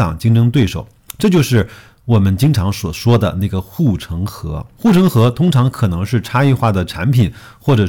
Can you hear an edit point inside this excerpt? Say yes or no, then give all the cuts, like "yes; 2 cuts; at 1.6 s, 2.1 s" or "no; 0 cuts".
no; 0 cuts